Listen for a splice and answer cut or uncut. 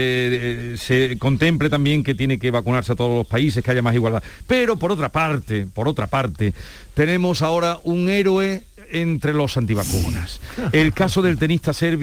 uncut